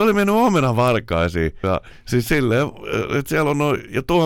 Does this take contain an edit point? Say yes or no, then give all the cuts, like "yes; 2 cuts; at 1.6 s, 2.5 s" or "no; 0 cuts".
yes; 1 cut; at 1.6 s